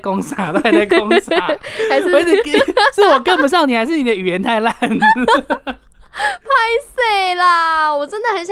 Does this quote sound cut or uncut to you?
uncut